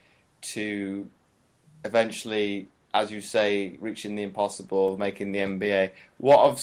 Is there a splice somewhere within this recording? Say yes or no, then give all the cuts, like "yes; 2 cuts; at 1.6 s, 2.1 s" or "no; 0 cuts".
no; 0 cuts